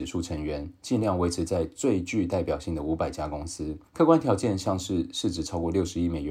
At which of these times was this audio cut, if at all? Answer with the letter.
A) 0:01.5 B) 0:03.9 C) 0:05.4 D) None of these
B